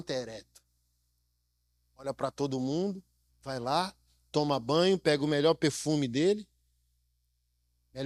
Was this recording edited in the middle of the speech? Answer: yes; 1 cut; at 3.3 s

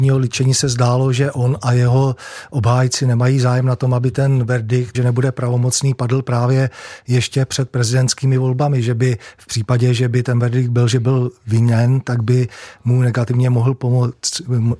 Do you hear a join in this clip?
yes; 1 cut; at 4.9 s

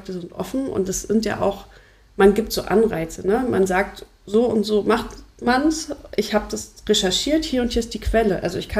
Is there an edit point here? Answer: no; 0 cuts

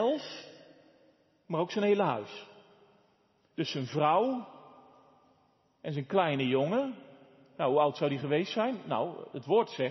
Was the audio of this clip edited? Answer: no; 0 cuts

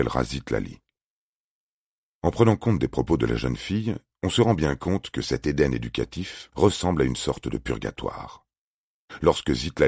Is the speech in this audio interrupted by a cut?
yes; 1 cut; at 6.5 s

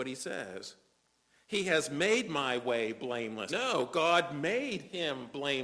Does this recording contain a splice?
yes; 1 cut; at 3.5 s

